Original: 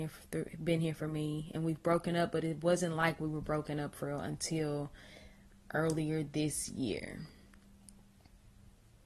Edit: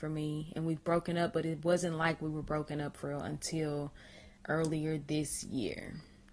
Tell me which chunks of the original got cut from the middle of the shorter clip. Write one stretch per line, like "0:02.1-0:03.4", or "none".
0:05.4-0:05.6